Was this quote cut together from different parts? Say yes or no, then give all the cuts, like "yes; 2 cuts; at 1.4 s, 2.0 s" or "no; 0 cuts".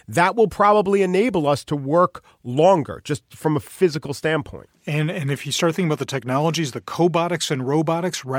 no; 0 cuts